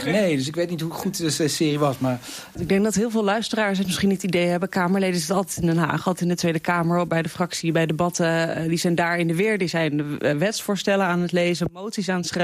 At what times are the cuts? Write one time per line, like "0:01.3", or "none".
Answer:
none